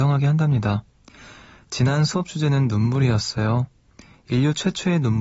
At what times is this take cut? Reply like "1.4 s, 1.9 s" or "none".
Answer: none